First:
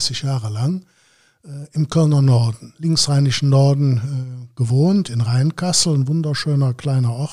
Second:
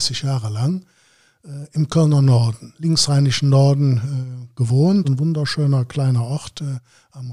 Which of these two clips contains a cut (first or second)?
second